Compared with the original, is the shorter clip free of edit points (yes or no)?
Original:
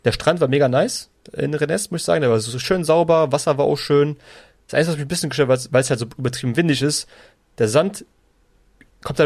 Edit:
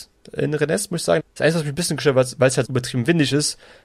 no